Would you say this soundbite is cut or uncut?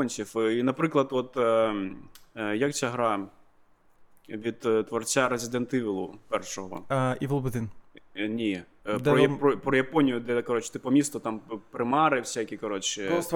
uncut